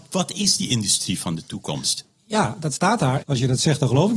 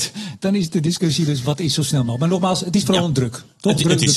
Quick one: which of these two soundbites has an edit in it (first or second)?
first